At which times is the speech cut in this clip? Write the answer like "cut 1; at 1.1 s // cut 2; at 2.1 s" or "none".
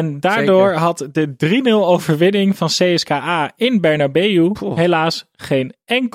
none

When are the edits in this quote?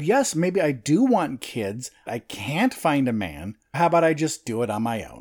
cut 1; at 2.1 s // cut 2; at 3.7 s

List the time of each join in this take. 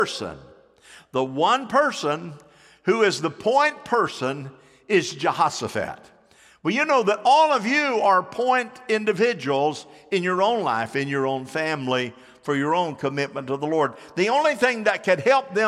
none

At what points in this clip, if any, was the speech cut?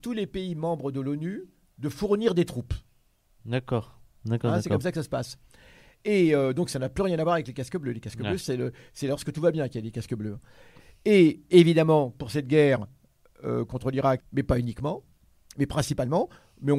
cut 1; at 3.4 s // cut 2; at 8.4 s // cut 3; at 14.2 s

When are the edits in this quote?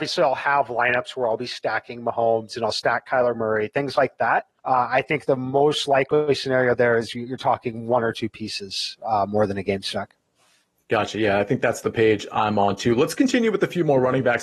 cut 1; at 4.6 s

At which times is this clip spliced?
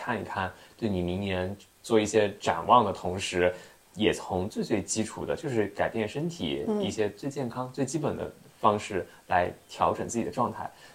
none

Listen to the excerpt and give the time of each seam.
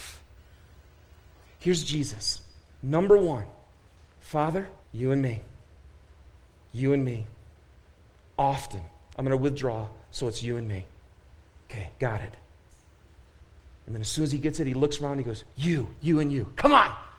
cut 1; at 4.8 s // cut 2; at 16.0 s

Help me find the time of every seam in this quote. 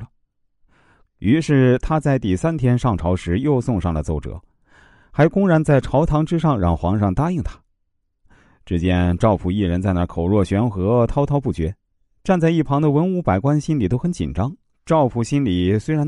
cut 1; at 1.0 s // cut 2; at 14.7 s

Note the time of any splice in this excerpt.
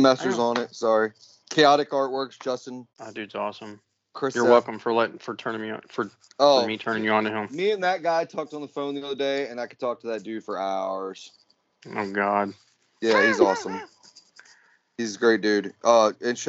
cut 1; at 2.9 s

